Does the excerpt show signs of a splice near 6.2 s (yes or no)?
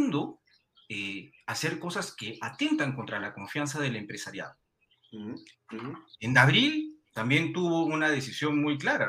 no